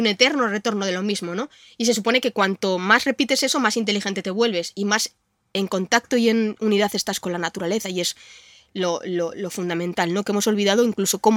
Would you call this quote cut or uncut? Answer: uncut